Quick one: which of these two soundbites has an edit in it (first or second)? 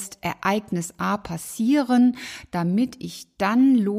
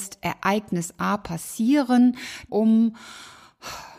second